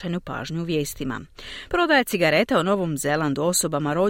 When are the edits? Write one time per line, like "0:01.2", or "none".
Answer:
0:01.7